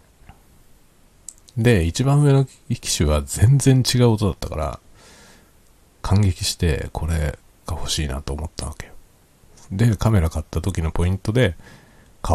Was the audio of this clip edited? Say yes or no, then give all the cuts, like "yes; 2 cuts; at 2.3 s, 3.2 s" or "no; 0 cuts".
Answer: no; 0 cuts